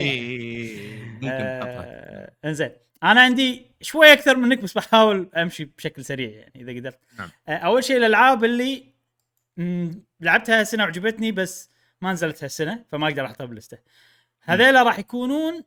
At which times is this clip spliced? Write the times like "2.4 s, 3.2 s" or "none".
none

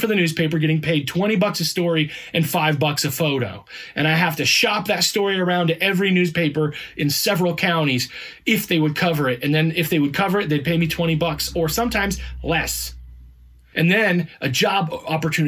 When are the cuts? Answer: 13.7 s

